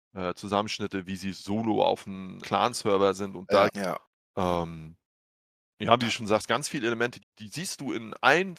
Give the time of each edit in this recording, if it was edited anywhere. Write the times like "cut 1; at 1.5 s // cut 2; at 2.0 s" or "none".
cut 1; at 2.4 s // cut 2; at 3.7 s // cut 3; at 7.2 s